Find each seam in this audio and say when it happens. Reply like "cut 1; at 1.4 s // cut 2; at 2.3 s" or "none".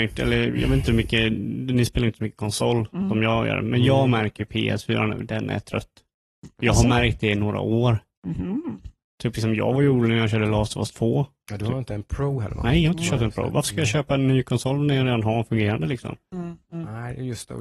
none